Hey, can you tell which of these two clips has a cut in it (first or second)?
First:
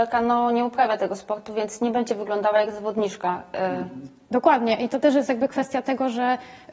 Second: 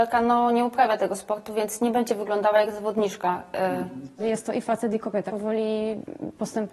second